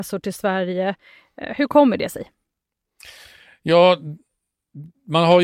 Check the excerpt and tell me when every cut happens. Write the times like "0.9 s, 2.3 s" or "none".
none